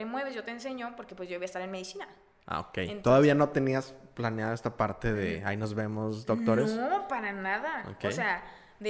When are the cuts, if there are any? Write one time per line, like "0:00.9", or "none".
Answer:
none